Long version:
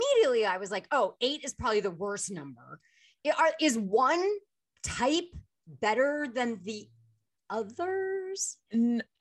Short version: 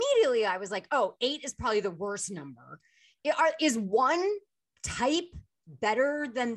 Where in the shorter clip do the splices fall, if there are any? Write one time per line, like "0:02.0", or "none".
none